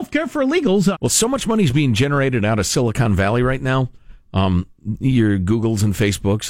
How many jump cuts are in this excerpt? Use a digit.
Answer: 1